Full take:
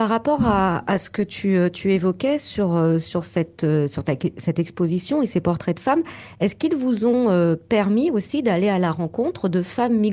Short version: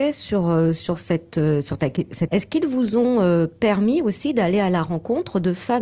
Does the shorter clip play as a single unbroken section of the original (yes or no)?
no